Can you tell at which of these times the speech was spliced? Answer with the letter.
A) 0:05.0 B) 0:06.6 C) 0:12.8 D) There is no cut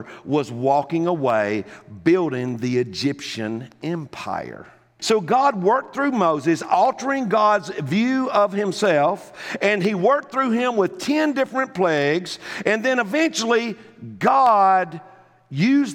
A